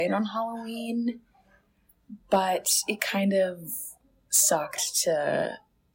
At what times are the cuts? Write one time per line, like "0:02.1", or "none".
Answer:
none